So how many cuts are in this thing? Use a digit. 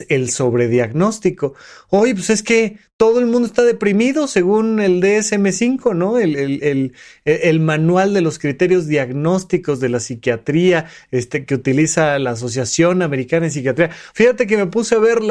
1